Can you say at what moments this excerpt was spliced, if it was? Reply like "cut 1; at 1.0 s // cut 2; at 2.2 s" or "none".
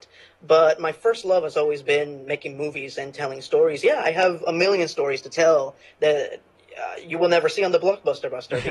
none